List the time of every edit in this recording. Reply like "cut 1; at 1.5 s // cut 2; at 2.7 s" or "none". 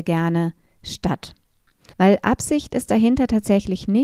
cut 1; at 1.9 s